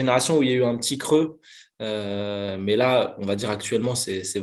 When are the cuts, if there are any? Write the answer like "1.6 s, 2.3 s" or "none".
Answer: none